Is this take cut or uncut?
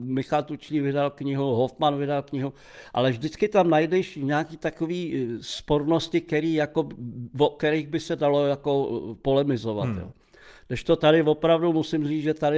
uncut